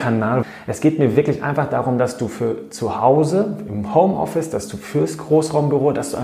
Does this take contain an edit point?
no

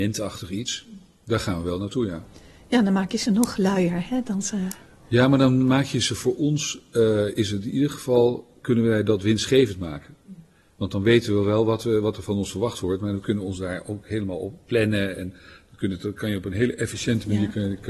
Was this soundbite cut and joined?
no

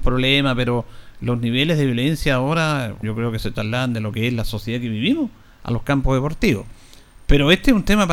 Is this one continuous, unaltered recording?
no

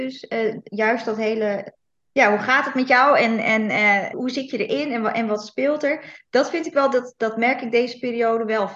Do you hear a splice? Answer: yes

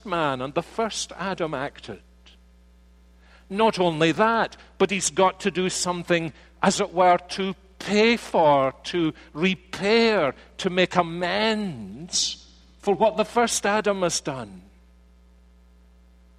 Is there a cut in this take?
no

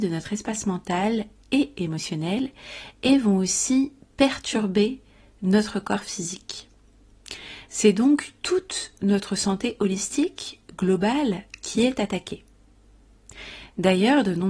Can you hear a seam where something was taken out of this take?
no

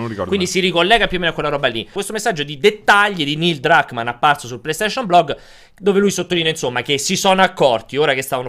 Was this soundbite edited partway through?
yes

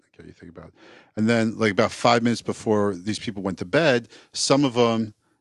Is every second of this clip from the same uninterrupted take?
yes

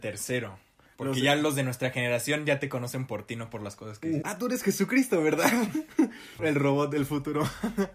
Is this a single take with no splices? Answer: no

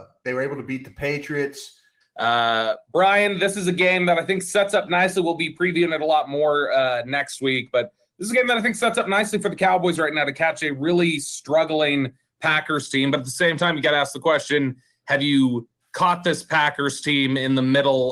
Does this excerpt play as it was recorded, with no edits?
no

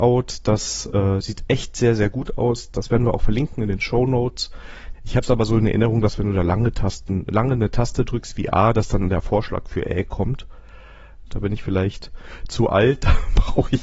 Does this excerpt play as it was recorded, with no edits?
no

